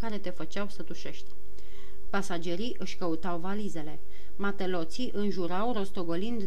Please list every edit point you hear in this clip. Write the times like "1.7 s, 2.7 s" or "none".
2.1 s